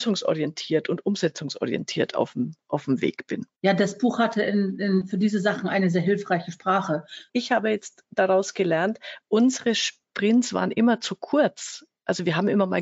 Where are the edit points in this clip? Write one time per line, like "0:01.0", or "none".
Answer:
0:07.3